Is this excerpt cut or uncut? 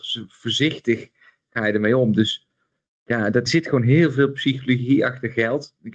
cut